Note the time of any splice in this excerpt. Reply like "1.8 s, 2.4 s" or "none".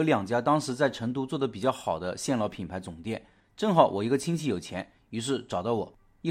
3.4 s, 5.0 s